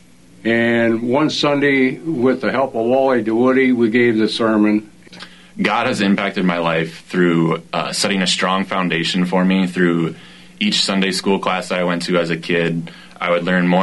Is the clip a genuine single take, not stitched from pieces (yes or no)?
yes